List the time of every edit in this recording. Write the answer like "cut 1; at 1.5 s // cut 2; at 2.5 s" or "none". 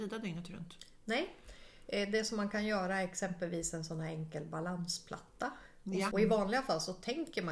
cut 1; at 6.1 s